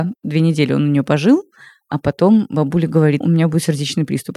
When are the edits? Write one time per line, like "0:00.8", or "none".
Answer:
0:03.2